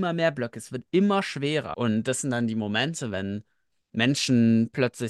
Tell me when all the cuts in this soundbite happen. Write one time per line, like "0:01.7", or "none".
0:01.7

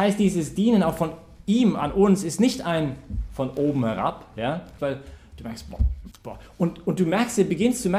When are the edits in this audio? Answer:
0:04.8
0:06.1

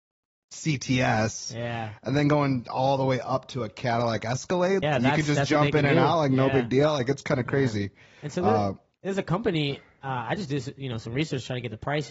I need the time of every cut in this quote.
0:04.8

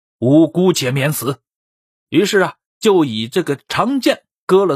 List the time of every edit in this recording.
0:01.6
0:02.7

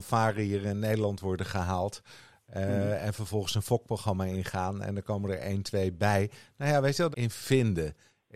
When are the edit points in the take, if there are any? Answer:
0:07.1

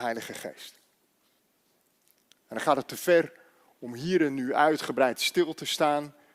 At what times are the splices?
none

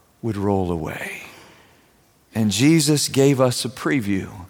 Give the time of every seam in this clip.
none

